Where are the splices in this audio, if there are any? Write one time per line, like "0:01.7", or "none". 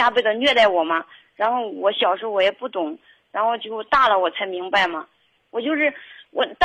0:05.4